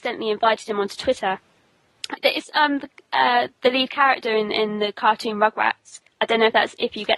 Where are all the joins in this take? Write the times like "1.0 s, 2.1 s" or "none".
2.2 s